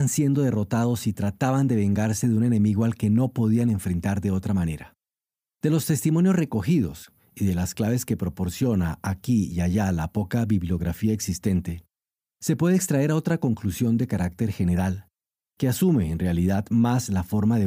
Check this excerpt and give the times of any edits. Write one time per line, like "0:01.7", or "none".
0:05.5